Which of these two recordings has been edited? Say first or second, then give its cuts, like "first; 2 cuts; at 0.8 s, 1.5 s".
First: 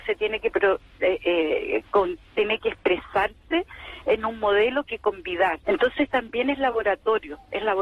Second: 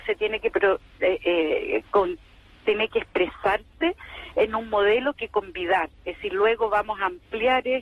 first; 2 cuts; at 2.3 s, 5.6 s